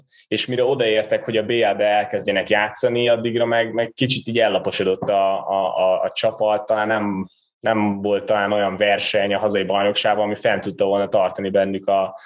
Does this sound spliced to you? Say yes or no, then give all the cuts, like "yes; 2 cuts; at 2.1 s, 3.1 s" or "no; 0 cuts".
no; 0 cuts